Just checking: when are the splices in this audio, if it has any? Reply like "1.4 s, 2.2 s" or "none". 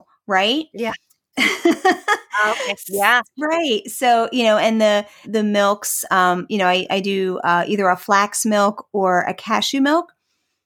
1.3 s, 5.2 s